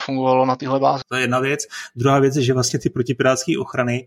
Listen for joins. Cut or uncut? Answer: cut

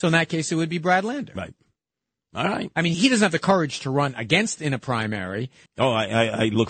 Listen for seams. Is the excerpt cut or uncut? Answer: cut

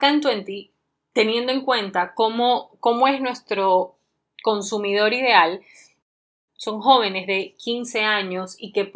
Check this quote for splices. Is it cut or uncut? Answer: uncut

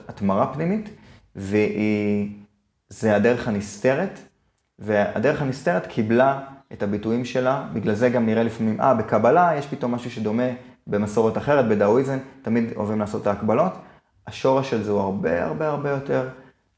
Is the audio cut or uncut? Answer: uncut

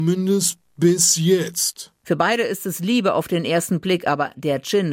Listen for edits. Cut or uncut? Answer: cut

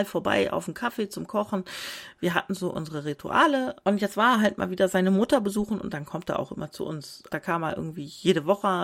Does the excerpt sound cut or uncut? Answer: cut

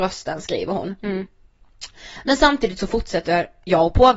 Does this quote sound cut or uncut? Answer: uncut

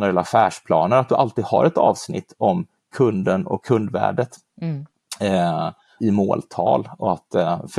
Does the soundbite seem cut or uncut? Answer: cut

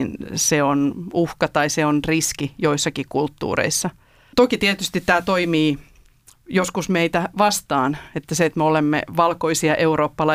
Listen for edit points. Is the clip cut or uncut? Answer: cut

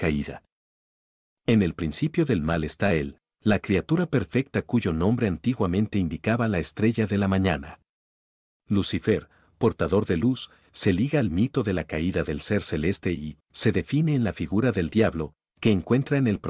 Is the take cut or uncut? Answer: cut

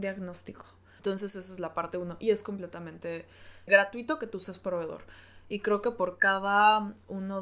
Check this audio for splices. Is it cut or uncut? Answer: cut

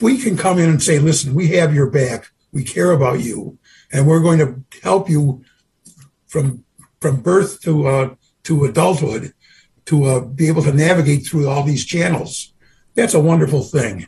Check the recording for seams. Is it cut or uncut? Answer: uncut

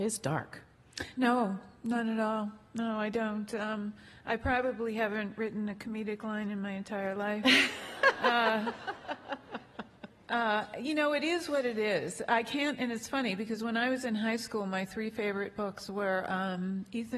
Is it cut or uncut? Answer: uncut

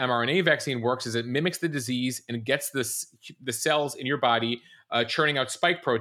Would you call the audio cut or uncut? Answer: uncut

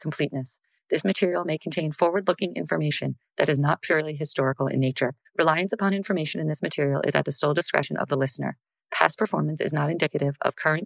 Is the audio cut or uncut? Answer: cut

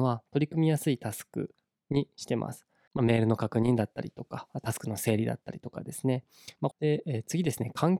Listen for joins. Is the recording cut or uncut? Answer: cut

